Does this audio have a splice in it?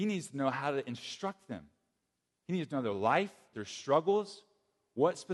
yes; 1 cut; at 3.5 s

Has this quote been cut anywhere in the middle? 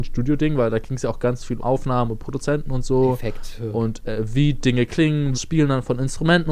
yes; 2 cuts; at 1.6 s, 5.3 s

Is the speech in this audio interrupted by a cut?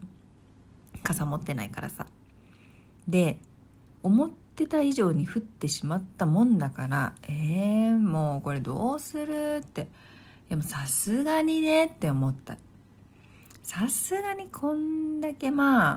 no; 0 cuts

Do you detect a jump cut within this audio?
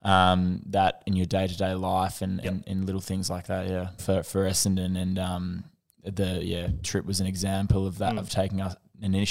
yes; 1 cut; at 4.0 s

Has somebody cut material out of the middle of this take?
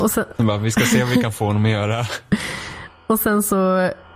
no; 0 cuts

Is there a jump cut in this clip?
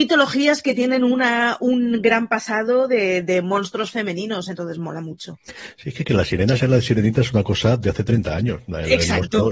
no; 0 cuts

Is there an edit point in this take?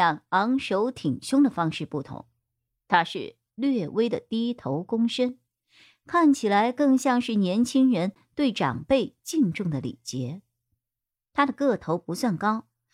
yes; 1 cut; at 11.2 s

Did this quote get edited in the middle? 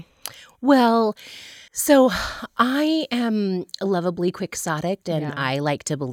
yes; 2 cuts; at 1.7 s, 5.0 s

